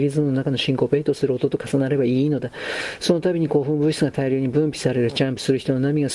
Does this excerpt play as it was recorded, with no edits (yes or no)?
yes